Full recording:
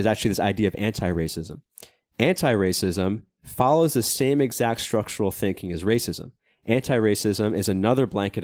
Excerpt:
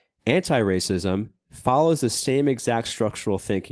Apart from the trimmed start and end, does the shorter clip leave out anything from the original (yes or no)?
no